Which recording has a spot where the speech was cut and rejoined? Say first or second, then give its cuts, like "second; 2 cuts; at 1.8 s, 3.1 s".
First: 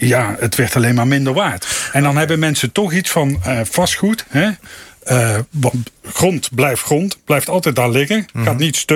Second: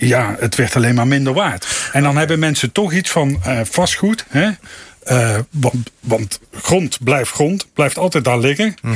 first; 1 cut; at 6.0 s